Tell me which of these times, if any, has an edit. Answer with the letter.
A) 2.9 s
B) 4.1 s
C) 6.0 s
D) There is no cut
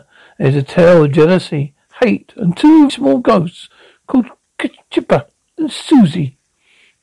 A